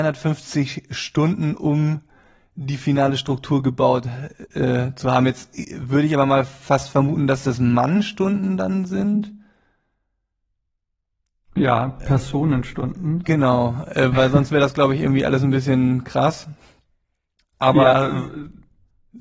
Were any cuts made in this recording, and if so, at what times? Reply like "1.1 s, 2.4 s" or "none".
none